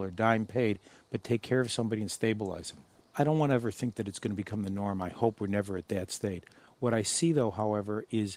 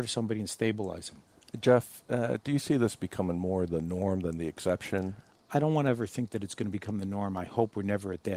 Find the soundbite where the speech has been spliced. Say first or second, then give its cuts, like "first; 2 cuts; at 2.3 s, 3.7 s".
first; 1 cut; at 3.0 s